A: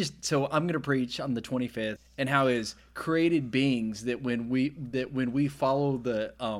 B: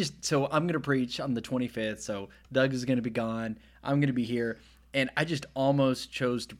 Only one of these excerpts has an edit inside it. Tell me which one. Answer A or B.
A